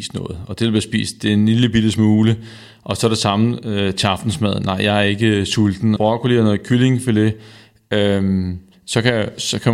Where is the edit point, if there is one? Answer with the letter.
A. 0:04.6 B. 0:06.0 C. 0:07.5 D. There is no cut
B